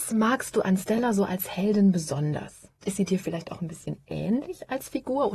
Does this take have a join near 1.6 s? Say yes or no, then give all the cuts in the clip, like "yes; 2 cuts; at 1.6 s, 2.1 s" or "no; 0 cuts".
no; 1 cut; at 2.8 s